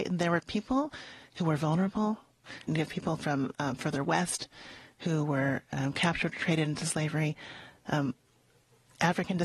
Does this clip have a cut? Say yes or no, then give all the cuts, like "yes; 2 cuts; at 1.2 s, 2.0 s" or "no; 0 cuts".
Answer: yes; 1 cut; at 2.7 s